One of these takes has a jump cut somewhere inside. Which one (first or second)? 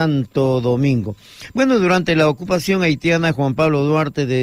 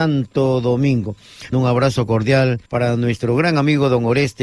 second